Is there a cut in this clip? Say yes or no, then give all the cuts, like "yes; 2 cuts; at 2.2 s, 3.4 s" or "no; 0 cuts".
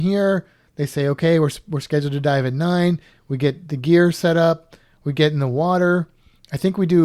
no; 0 cuts